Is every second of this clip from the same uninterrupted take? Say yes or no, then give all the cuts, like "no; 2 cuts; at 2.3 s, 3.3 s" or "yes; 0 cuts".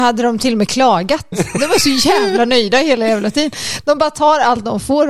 no; 1 cut; at 1.3 s